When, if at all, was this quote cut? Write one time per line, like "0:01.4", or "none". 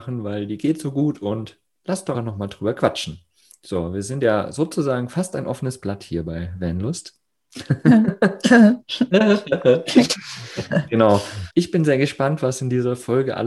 0:02.1
0:11.5